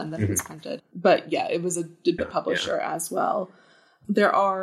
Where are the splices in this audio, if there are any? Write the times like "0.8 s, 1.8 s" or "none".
2.2 s